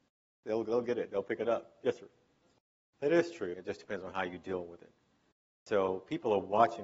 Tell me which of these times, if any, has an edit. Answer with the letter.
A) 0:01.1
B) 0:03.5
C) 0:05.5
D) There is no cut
B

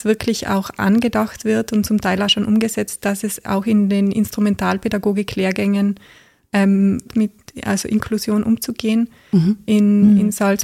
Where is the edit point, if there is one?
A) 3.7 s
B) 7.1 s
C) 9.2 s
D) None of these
B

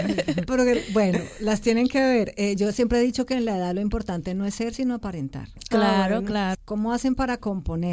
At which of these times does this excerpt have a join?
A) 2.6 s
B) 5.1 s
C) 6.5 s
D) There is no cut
C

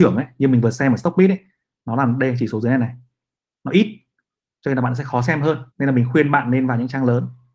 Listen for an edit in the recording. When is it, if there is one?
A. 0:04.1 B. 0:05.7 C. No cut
B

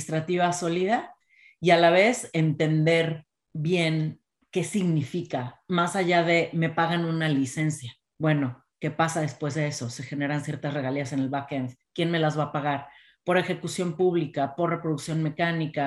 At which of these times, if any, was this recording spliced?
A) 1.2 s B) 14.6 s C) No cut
C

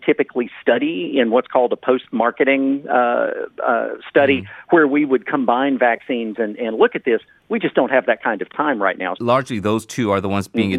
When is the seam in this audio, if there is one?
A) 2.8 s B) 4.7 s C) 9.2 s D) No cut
C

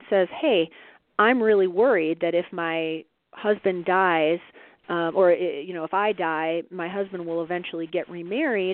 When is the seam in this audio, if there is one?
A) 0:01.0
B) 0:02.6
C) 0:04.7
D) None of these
D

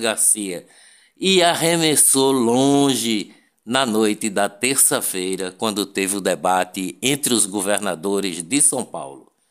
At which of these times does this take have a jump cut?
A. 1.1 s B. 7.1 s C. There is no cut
C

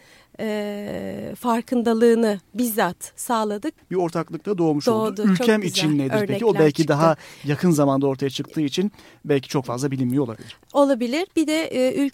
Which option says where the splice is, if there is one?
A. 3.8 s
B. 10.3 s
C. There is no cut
A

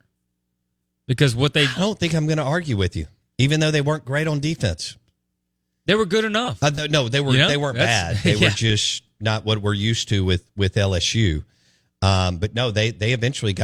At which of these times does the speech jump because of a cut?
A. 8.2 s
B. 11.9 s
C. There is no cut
C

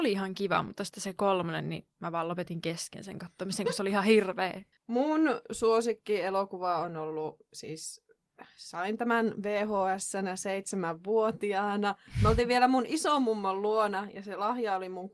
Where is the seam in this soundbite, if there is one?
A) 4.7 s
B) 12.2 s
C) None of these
A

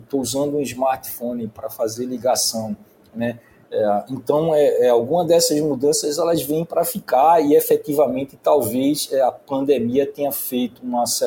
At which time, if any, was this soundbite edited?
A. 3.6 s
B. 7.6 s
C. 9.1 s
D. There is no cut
A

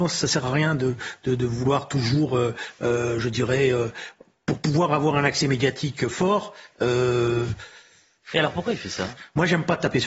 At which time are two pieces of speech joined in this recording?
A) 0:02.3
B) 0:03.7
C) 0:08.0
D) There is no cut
D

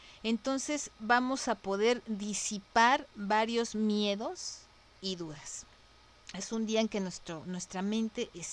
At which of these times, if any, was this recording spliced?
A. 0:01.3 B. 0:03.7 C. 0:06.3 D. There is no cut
D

